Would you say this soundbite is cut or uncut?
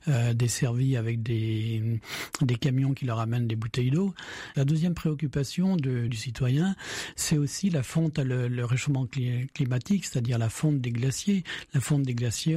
cut